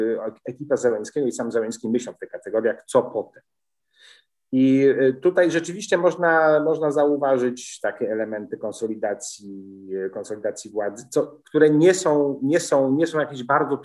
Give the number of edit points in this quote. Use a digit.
0